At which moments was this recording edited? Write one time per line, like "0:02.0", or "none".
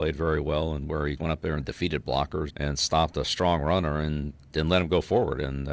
0:01.2
0:02.5